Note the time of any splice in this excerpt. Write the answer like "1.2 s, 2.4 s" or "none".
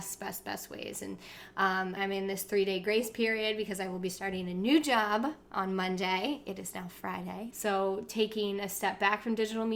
2.0 s, 7.5 s